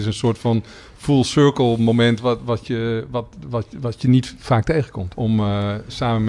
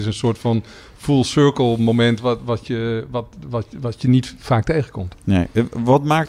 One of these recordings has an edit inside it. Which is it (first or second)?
first